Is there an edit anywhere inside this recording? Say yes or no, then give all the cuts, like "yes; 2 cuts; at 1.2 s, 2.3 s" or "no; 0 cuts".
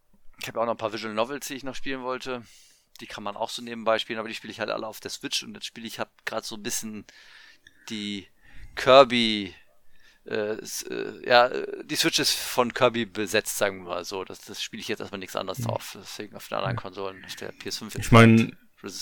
no; 0 cuts